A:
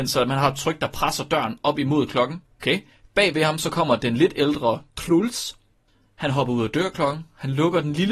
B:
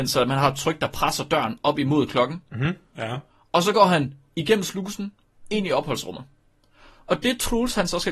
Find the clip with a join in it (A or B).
A